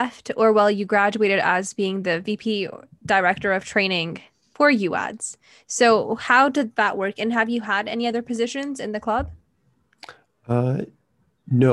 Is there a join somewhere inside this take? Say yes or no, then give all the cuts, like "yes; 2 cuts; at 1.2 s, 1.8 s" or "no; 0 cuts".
no; 0 cuts